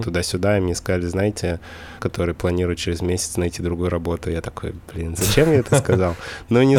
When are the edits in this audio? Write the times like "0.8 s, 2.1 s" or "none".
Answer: 2.0 s